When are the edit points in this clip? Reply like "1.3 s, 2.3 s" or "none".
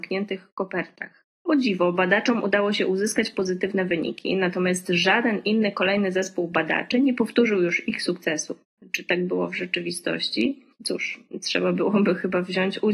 8.8 s

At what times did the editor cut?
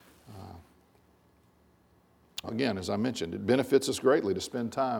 2.4 s

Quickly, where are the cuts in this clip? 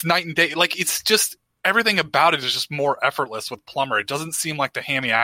none

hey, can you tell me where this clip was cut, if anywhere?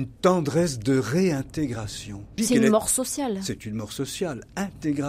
2.4 s

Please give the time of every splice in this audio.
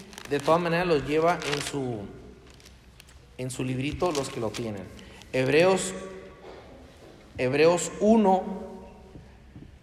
none

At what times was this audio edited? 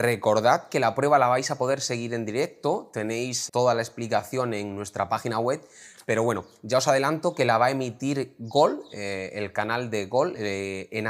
3.5 s

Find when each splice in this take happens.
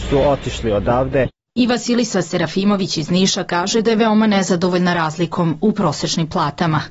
none

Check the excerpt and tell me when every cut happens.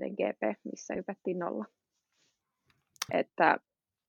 3.1 s

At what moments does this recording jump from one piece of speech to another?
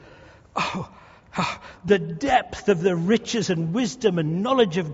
none

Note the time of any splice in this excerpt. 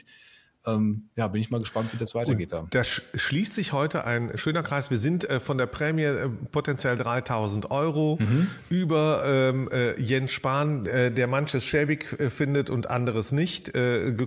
none

